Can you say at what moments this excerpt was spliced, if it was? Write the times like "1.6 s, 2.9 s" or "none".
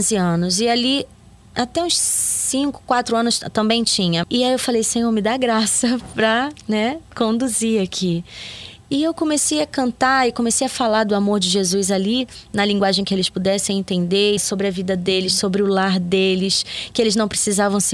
4.2 s, 14.4 s